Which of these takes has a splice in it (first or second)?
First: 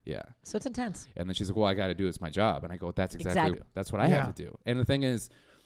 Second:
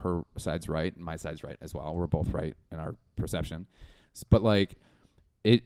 first